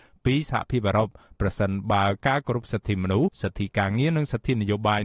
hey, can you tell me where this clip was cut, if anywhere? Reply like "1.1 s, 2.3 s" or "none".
3.3 s